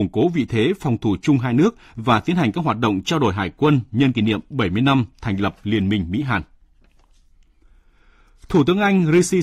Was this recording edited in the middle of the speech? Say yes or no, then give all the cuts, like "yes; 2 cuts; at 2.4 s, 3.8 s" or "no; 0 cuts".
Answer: no; 0 cuts